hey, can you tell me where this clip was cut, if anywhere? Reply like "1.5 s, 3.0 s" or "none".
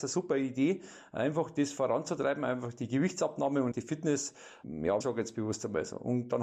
3.7 s, 5.0 s